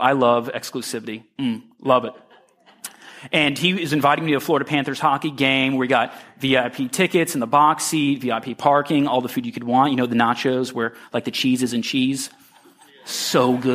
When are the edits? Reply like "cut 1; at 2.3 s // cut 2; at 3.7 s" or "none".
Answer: none